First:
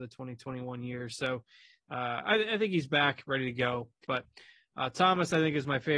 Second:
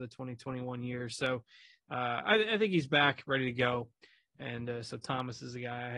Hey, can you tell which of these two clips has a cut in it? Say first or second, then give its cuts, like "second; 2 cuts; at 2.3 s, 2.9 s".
first; 1 cut; at 4.0 s